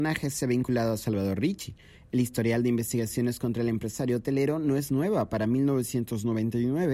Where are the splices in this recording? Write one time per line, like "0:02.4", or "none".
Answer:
none